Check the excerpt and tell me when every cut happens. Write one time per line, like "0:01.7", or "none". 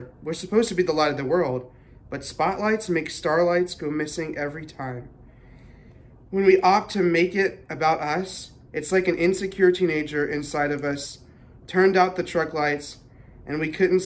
none